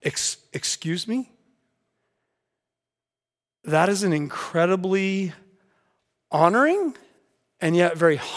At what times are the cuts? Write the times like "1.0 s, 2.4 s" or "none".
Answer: none